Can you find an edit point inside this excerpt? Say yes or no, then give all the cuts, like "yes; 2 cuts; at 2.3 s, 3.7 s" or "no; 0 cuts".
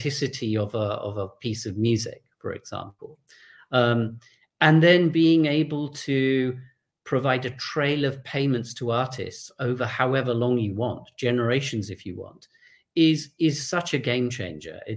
no; 0 cuts